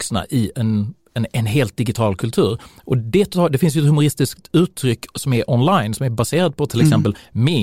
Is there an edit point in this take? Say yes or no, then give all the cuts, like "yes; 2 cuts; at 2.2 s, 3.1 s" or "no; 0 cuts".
no; 0 cuts